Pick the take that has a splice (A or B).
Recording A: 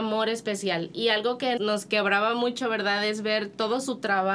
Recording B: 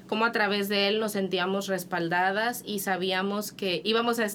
A